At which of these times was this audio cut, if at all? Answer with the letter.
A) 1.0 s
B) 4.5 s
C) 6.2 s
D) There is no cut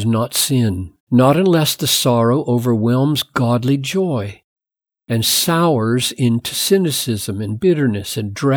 A